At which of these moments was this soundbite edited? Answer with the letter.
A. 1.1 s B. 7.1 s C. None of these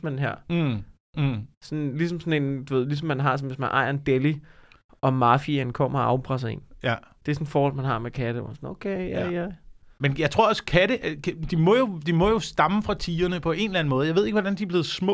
C